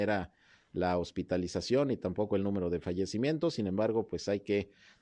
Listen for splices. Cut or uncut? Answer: uncut